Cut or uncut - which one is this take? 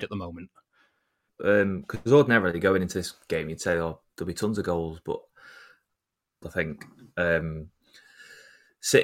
cut